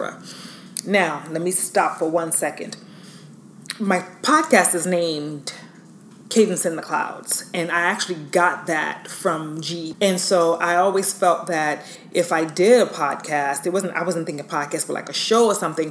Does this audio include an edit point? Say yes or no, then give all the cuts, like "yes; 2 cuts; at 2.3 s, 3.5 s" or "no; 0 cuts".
yes; 1 cut; at 9.9 s